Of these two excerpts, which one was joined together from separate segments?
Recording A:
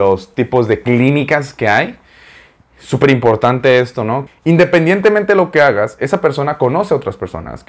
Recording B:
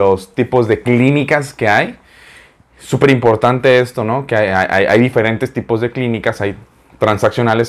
A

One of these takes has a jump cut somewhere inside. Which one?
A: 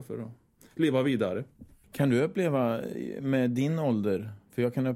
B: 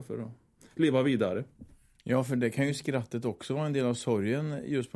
A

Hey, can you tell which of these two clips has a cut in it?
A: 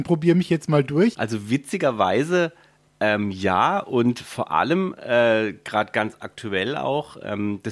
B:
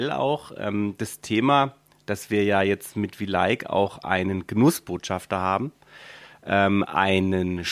A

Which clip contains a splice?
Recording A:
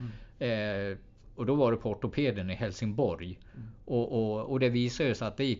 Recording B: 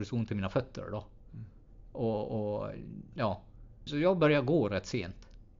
B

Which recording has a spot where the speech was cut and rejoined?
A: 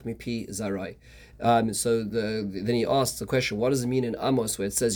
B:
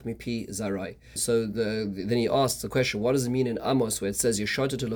B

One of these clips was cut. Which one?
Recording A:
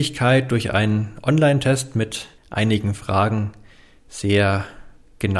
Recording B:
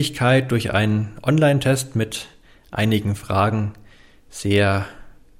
A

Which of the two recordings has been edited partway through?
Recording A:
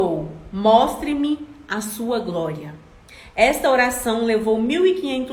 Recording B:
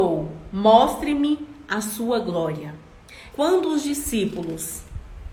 B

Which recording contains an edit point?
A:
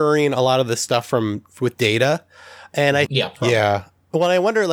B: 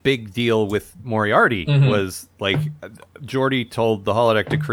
A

